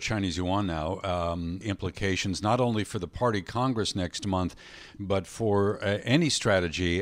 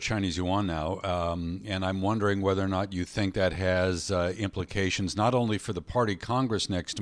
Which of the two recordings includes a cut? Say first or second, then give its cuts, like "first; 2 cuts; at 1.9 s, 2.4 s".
first; 1 cut; at 1.6 s